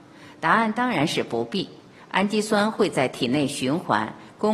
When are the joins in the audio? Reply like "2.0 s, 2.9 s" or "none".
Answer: none